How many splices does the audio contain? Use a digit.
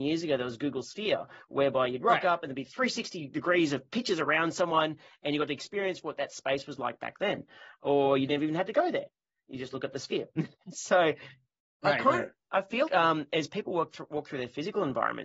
1